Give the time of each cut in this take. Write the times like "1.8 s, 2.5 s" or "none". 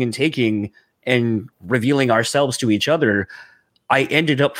1.5 s

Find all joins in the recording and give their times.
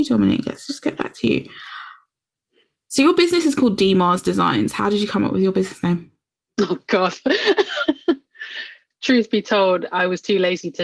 none

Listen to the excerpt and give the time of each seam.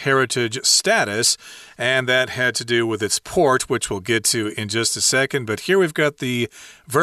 none

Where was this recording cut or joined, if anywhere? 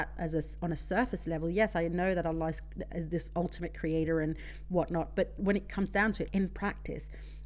6.3 s

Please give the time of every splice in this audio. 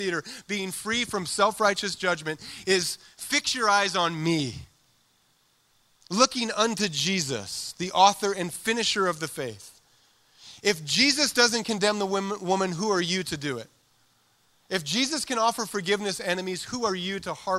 none

